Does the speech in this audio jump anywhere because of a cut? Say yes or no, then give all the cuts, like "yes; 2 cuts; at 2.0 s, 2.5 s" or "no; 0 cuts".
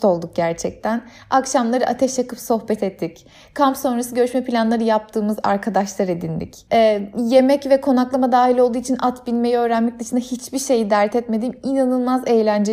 no; 0 cuts